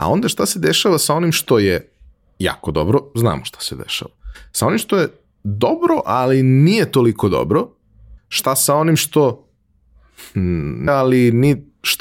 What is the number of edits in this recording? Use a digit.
2